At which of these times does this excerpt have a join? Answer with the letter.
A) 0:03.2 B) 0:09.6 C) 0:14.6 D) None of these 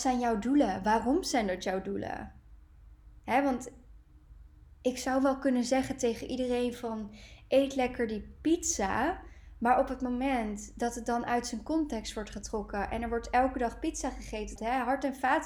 C